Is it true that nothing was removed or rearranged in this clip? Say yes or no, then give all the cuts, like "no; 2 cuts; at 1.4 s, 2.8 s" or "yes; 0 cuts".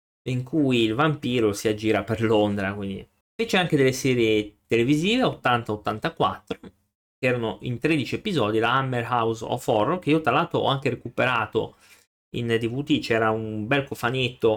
no; 1 cut; at 3.2 s